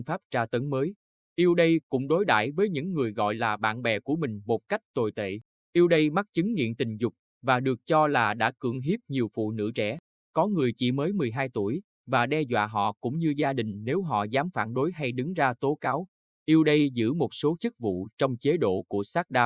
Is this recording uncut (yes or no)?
yes